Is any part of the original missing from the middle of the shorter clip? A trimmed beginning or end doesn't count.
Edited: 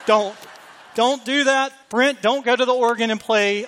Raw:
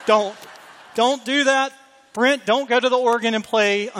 yes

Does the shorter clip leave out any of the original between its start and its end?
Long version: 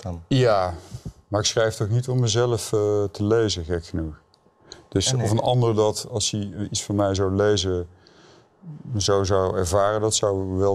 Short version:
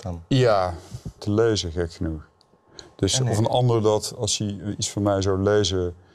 yes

